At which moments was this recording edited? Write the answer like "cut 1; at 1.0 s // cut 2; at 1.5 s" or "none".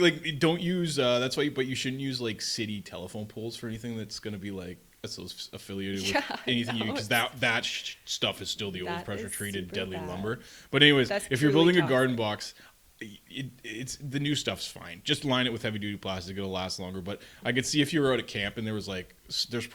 none